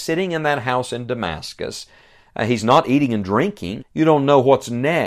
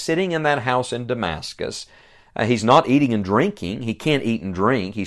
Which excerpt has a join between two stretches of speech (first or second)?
first